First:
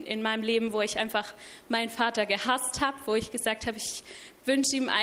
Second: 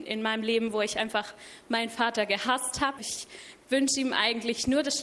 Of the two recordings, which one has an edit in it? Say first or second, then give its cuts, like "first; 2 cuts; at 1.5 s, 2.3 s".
second; 1 cut; at 3.0 s